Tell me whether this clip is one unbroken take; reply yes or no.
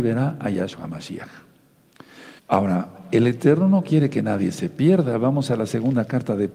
no